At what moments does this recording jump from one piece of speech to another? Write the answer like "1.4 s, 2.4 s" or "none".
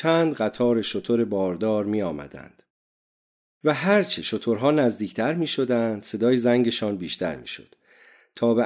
3.5 s